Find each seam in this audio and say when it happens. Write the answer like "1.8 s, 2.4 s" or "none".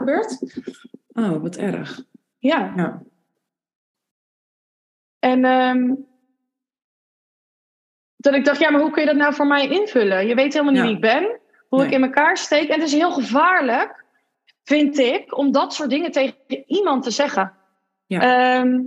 none

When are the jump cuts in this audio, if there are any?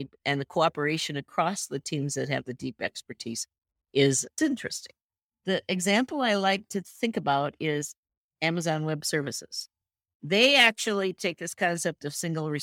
none

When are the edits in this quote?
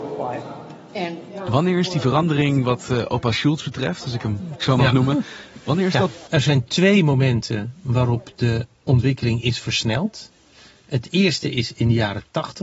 6.3 s

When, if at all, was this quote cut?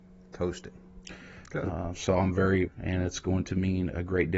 1.4 s, 2.7 s

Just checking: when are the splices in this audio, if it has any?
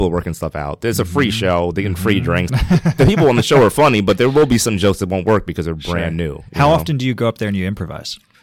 none

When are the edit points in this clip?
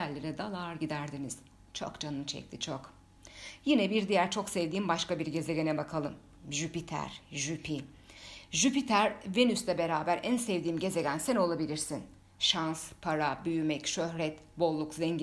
none

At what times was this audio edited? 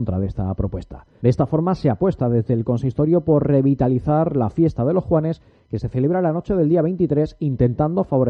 1.2 s

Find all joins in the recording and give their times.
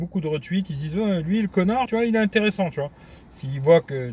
1.9 s

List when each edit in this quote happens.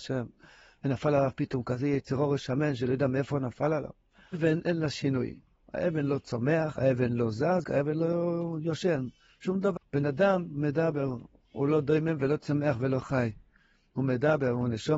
4.3 s, 7.6 s, 9.8 s

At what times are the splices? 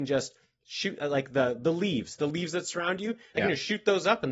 none

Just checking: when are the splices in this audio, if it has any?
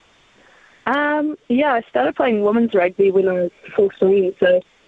1.4 s

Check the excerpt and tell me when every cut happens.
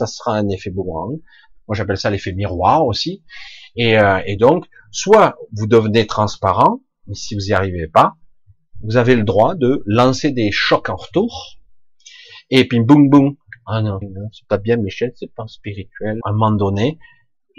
14.0 s, 16.2 s

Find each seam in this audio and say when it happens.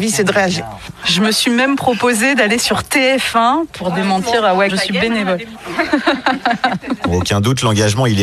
4.7 s

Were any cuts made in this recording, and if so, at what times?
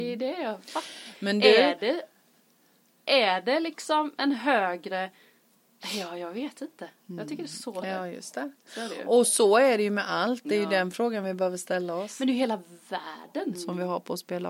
7.8 s, 13.5 s

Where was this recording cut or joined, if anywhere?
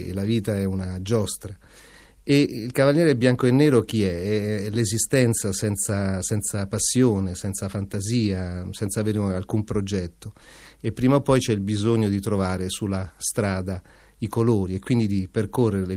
none

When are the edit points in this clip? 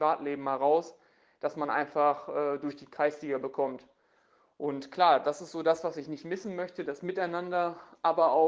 none

